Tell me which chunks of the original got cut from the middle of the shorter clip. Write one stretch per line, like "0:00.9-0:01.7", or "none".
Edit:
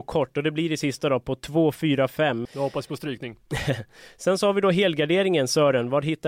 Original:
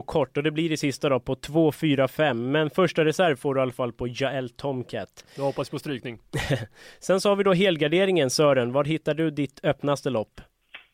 0:02.5-0:05.3

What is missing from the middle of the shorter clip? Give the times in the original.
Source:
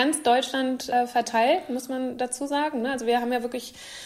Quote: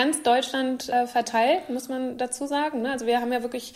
none

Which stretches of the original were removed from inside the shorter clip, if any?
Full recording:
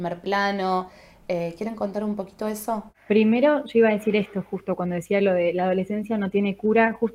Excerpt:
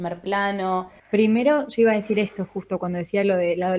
0:01.0-0:03.0

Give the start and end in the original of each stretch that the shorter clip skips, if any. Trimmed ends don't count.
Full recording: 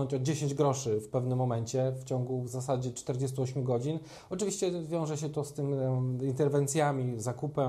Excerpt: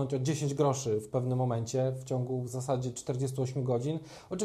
none

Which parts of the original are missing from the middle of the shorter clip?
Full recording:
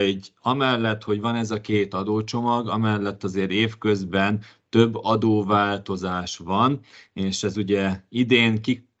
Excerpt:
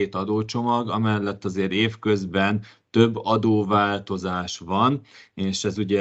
none

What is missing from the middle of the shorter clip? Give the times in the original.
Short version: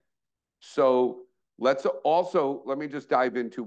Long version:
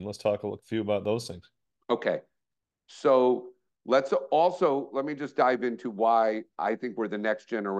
none

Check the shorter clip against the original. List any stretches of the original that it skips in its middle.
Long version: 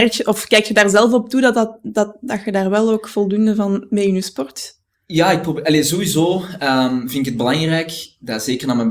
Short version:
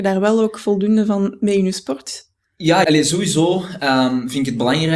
0:05.3-0:05.6

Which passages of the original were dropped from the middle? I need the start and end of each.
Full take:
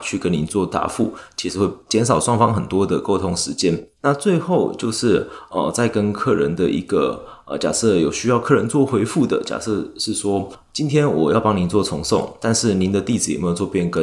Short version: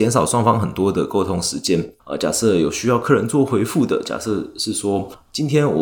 0:03.9-0:07.4

